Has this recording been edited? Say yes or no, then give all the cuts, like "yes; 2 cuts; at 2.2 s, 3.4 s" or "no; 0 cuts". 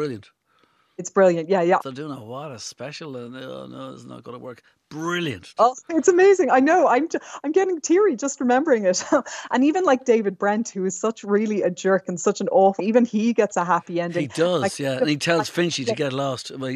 yes; 3 cuts; at 1.8 s, 5.6 s, 12.8 s